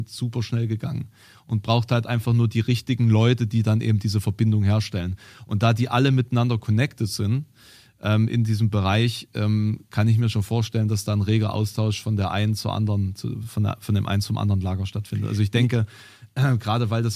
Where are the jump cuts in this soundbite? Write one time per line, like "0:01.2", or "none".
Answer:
none